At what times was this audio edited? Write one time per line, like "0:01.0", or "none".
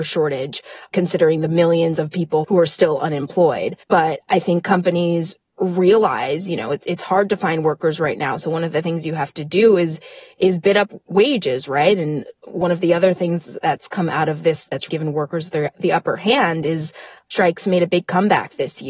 0:03.8
0:14.9
0:17.2